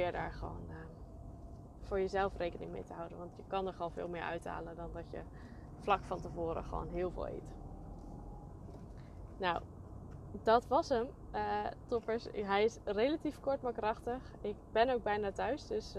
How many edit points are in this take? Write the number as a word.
zero